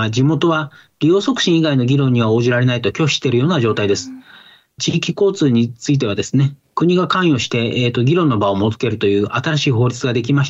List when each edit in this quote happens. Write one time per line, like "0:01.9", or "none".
none